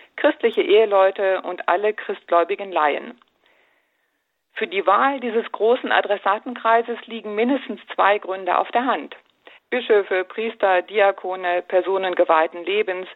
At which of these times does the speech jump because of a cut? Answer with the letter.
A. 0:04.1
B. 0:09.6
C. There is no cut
B